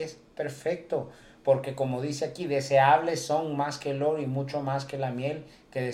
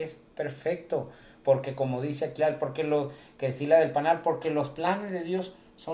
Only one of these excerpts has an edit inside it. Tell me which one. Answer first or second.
second